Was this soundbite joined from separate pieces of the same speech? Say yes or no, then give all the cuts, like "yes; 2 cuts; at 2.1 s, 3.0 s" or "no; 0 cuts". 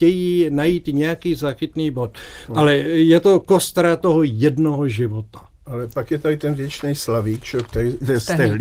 yes; 1 cut; at 2.5 s